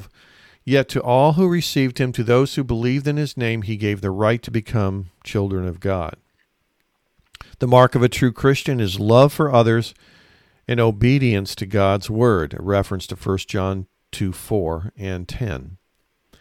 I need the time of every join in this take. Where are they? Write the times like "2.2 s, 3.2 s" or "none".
none